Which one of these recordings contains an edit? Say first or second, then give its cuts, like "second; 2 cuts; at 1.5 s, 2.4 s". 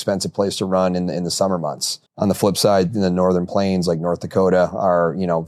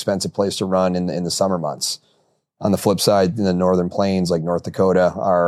first; 1 cut; at 2.1 s